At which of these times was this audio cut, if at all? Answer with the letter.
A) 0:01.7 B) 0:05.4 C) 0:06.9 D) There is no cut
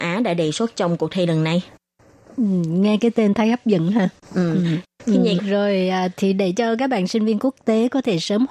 B